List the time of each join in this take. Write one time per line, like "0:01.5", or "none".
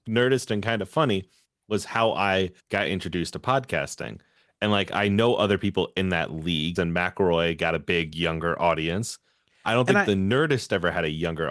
0:02.6
0:06.8